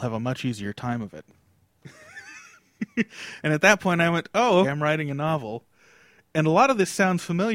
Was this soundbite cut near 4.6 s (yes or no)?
yes